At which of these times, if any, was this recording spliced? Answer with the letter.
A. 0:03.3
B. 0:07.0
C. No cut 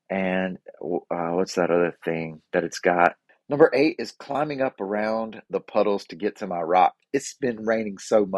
A